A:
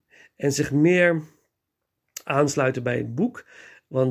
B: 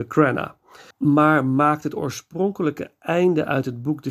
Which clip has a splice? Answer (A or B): B